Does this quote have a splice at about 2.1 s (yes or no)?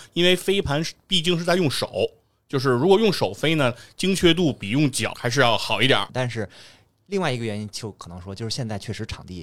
no